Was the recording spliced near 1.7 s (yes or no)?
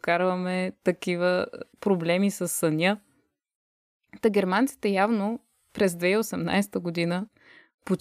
yes